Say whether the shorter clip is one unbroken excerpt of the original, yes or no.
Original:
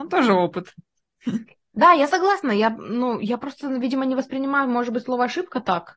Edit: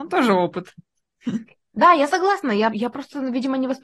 no